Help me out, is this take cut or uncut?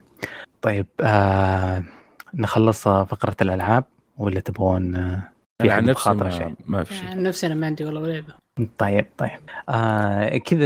uncut